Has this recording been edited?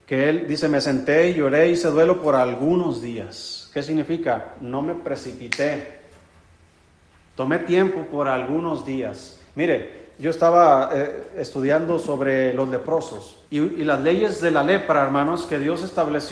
yes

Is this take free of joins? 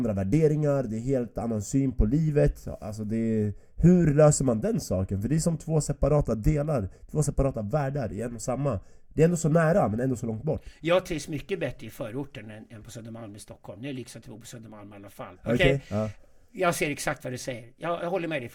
no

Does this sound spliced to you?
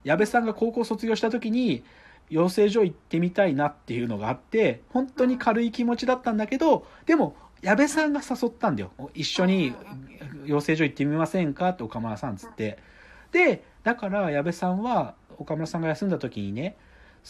no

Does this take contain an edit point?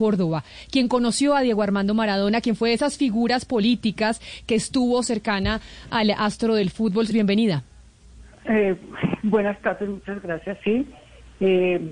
yes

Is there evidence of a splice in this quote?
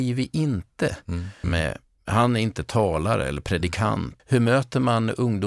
yes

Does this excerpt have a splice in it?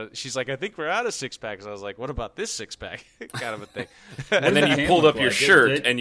no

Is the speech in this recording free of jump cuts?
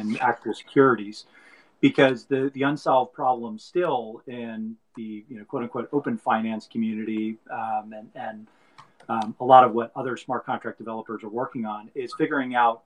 yes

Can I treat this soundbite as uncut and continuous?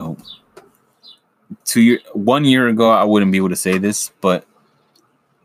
yes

